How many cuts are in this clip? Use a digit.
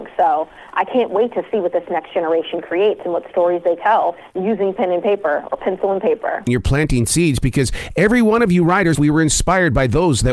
2